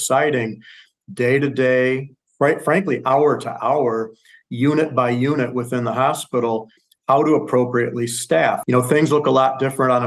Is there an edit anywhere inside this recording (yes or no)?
yes